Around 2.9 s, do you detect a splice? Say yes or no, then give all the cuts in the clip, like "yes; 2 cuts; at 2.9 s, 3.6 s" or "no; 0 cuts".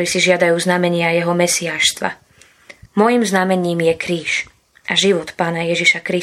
yes; 1 cut; at 2.9 s